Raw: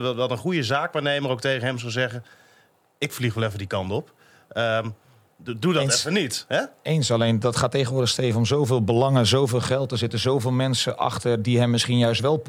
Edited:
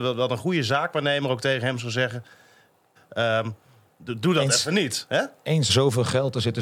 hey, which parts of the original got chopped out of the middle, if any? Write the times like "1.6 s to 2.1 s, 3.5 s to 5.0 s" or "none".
3.0 s to 4.3 s, 7.1 s to 9.3 s